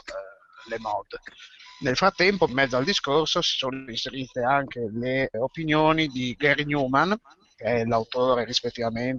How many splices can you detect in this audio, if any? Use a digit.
2